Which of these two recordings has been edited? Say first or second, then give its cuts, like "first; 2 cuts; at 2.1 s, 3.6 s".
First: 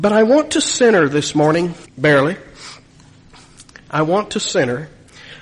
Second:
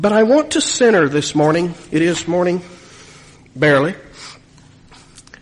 first; 1 cut; at 1.9 s